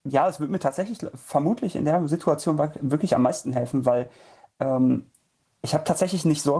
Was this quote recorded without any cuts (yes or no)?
yes